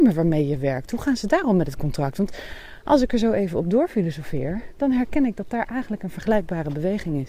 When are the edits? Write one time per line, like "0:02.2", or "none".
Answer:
none